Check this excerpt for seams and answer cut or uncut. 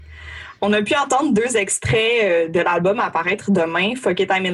uncut